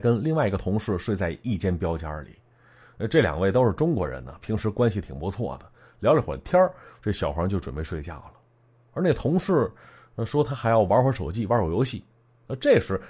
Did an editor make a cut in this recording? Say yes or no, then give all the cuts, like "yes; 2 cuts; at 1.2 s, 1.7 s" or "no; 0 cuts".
no; 0 cuts